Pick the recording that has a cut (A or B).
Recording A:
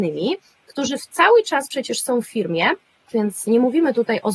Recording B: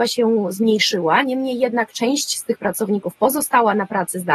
A